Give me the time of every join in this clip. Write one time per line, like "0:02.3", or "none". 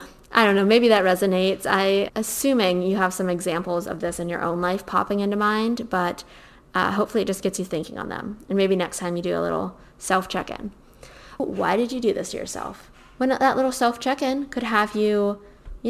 0:02.1
0:11.4